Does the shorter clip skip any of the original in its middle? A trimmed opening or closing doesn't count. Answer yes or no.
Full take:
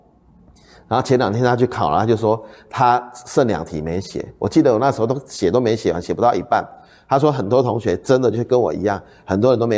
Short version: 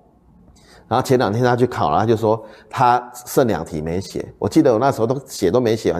no